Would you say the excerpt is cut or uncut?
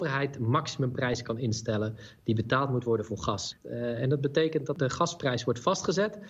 uncut